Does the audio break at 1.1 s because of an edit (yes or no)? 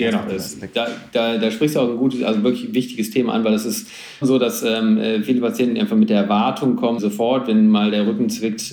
no